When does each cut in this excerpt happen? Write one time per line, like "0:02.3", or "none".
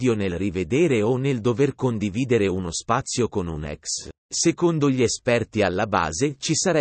0:04.2

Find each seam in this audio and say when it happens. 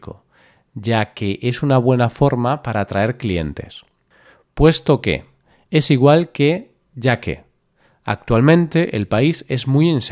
none

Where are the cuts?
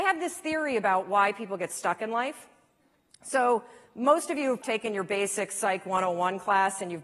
0:04.6

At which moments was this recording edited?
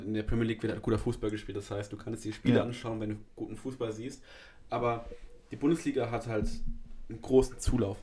none

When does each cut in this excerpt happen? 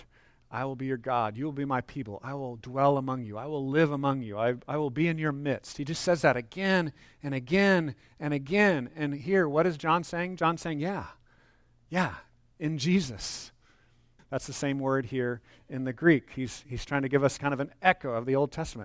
0:14.2

